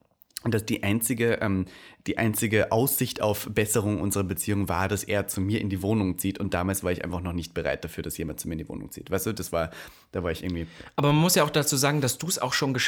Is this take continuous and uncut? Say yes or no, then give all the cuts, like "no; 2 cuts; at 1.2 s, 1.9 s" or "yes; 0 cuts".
yes; 0 cuts